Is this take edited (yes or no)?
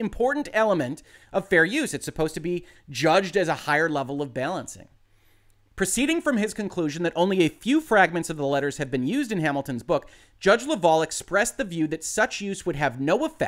no